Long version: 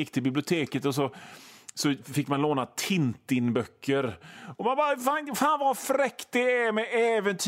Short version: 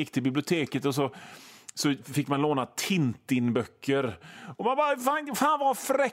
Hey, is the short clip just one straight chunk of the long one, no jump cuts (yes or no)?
yes